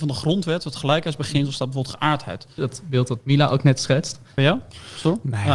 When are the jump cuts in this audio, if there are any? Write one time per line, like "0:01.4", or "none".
0:02.6
0:04.3